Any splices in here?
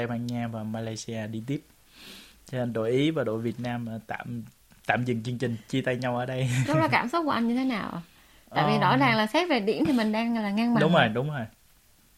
no; 0 cuts

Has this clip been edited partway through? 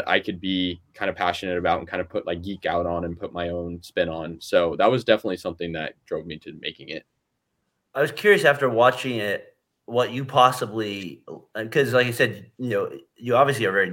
no; 0 cuts

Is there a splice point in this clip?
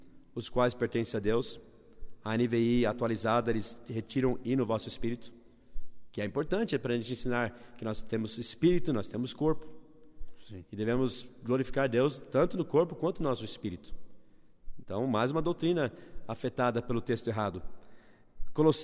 no; 0 cuts

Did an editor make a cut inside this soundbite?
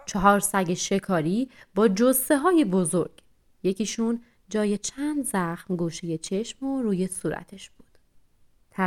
no; 0 cuts

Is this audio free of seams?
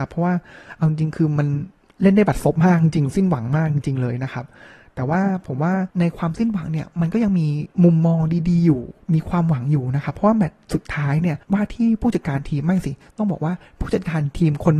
no; 3 cuts; at 5.9 s, 7.7 s, 11.4 s

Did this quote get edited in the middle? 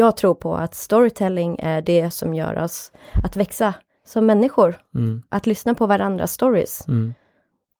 no; 0 cuts

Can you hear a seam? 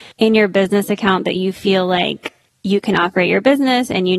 no; 0 cuts

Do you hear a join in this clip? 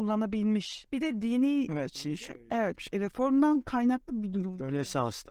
yes; 1 cut; at 1.7 s

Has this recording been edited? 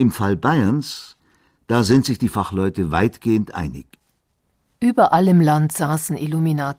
no; 0 cuts

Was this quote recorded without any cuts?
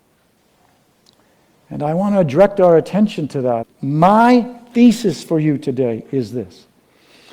no; 1 cut; at 3.6 s

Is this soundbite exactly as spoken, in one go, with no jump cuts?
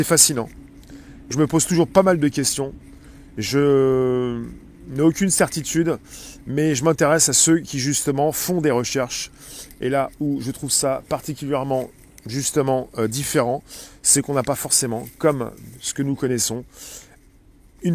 no; 1 cut; at 1.3 s

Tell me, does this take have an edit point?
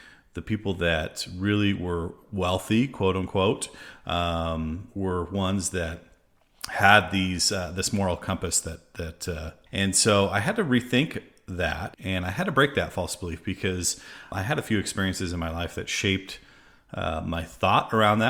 yes; 3 cuts; at 9.7 s, 11.9 s, 14.3 s

